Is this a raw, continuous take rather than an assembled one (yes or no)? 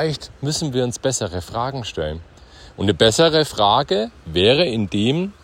yes